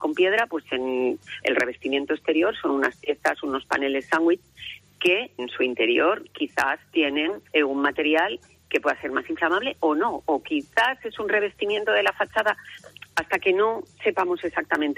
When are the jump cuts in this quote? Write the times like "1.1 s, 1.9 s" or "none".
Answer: 1.4 s, 5.4 s, 7.5 s